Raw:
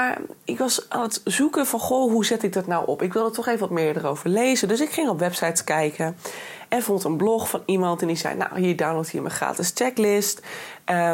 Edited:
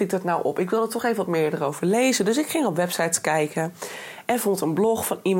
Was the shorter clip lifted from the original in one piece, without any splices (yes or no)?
yes